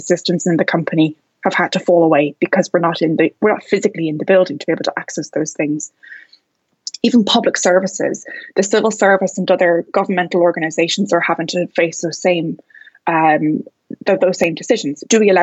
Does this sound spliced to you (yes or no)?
no